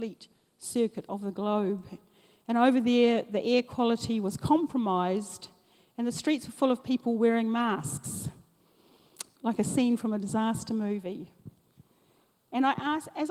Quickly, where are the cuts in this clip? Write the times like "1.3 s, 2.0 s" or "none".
9.4 s